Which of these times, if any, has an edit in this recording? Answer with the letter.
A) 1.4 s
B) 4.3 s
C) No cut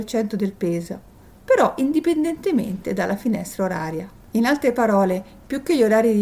B